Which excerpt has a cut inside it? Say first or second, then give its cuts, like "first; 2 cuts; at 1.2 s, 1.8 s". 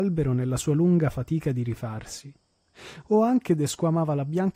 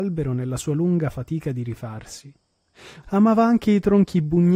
second; 1 cut; at 3.0 s